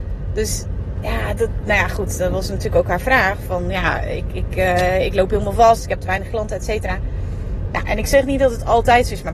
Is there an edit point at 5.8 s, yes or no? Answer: no